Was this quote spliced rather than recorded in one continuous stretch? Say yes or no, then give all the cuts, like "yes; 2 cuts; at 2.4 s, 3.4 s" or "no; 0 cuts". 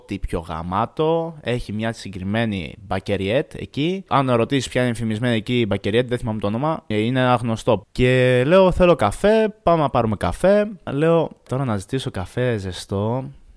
yes; 1 cut; at 4.1 s